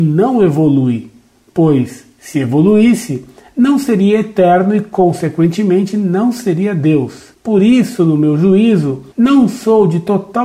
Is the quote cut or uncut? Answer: uncut